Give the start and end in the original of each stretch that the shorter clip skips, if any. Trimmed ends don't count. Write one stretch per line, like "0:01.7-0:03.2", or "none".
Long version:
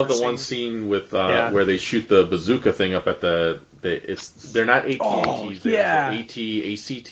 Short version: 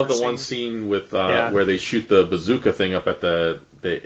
none

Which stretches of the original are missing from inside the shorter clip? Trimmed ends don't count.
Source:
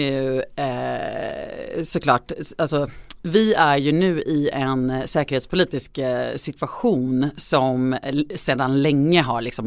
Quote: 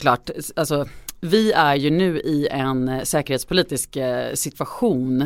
none

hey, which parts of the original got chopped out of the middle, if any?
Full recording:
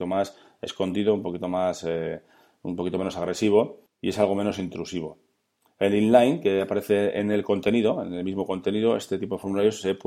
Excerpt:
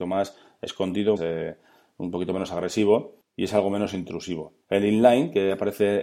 0:01.2-0:01.8
0:05.3-0:05.7

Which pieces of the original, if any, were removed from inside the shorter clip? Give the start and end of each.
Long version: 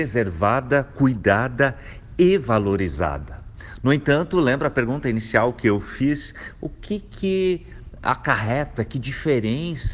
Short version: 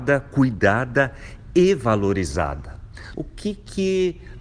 0:03.8-0:06.6

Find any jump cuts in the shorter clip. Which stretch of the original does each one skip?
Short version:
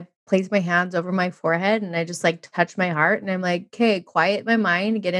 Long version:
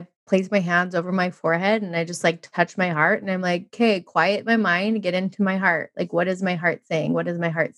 none

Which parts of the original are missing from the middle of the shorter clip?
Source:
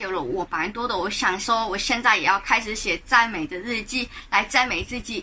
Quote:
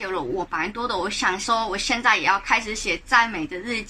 none

